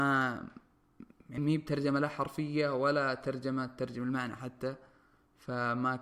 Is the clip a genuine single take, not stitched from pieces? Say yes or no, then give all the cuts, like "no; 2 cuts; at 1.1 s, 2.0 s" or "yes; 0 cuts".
no; 1 cut; at 1.4 s